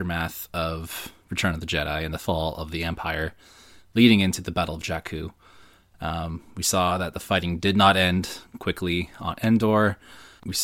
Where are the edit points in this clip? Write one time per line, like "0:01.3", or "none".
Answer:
none

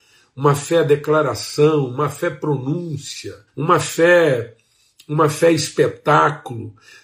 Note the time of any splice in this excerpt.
0:03.5

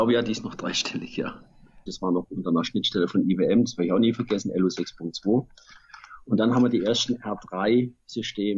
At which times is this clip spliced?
0:01.9

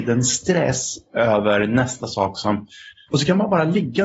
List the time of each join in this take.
0:03.1

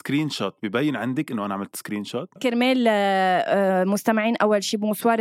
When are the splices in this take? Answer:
0:02.4

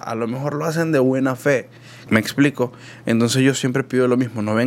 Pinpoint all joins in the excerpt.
0:02.1

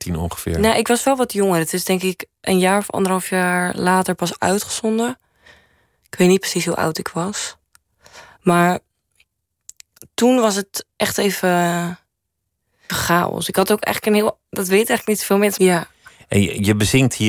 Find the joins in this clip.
0:12.9
0:15.6

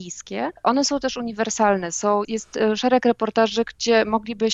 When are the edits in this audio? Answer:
0:02.2

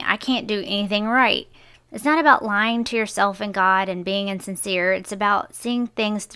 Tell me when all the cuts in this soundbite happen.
0:01.7

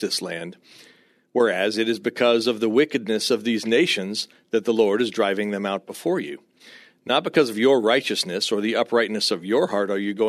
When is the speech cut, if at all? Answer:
none

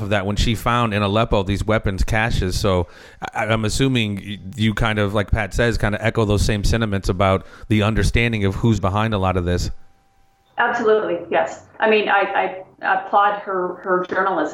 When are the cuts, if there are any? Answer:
0:08.8

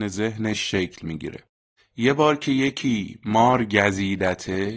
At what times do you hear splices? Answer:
0:01.8

